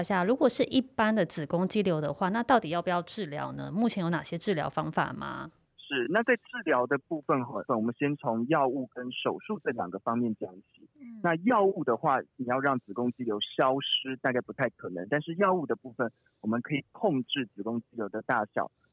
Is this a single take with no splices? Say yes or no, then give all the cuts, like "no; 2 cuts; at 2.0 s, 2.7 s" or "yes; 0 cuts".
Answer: yes; 0 cuts